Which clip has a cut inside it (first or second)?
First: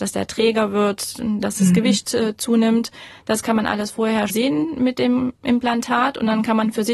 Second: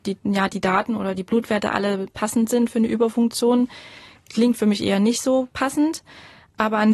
first